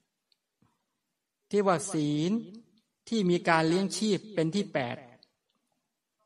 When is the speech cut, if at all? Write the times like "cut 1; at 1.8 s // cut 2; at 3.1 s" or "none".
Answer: none